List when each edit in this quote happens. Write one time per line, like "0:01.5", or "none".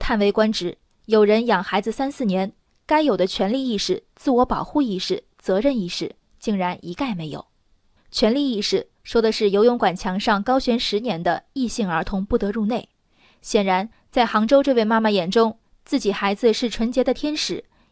none